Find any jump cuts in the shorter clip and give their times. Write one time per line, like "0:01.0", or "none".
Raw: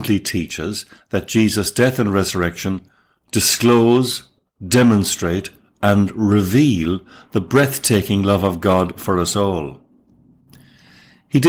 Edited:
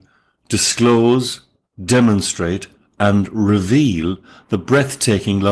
none